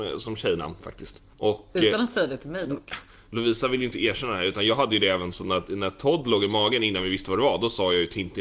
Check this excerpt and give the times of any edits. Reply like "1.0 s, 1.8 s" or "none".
1.3 s